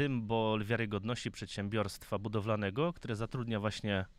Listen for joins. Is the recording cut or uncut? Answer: uncut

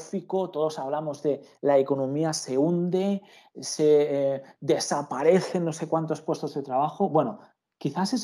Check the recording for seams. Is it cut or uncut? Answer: uncut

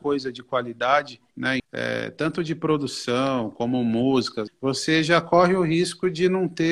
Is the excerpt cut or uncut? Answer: cut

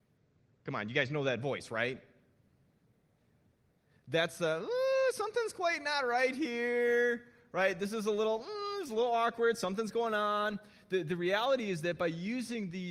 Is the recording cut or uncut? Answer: uncut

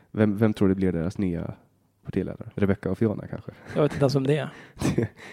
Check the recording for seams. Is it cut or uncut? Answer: cut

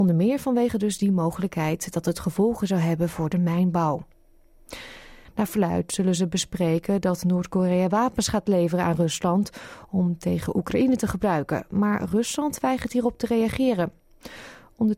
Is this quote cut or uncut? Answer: cut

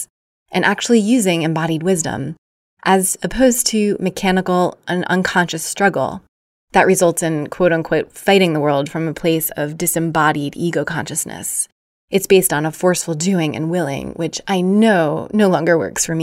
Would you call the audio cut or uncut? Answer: uncut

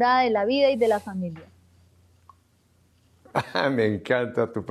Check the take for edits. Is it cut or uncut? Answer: uncut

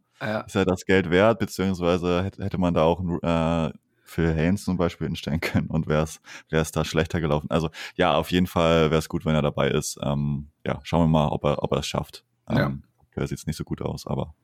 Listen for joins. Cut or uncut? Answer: uncut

